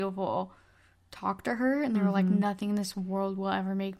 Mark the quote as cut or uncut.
uncut